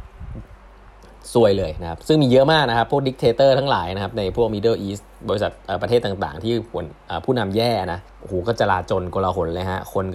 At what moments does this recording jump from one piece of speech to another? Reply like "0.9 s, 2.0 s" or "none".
8.1 s